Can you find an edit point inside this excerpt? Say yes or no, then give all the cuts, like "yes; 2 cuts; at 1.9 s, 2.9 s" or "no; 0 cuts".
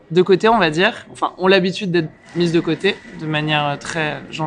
no; 0 cuts